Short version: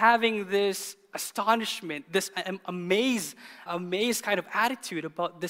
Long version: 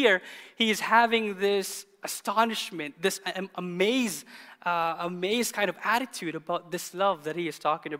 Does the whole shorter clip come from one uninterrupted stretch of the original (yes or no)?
no